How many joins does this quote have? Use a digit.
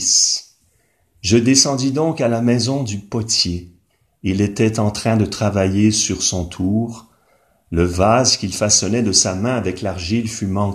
0